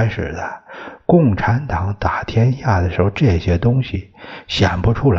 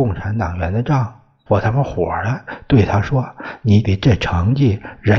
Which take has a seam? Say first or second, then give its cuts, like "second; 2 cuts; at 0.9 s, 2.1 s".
second; 2 cuts; at 1.5 s, 3.8 s